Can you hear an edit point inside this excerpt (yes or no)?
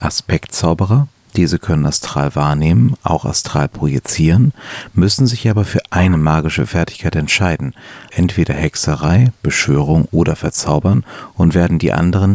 yes